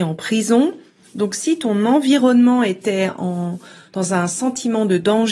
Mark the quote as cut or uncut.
uncut